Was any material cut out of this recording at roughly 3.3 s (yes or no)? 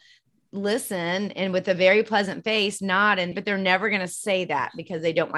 yes